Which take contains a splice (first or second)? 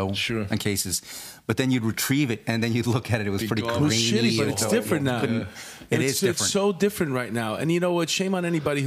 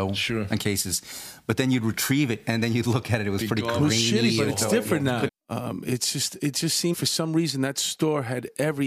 second